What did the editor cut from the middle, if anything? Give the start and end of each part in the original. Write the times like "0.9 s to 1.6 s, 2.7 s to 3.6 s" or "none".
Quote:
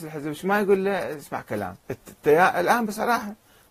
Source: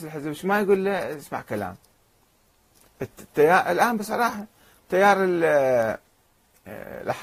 1.8 s to 2.9 s